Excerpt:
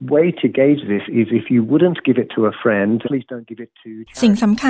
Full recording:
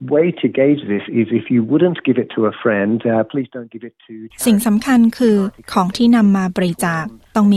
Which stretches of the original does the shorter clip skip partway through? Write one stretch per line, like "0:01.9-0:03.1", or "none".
0:03.0-0:03.3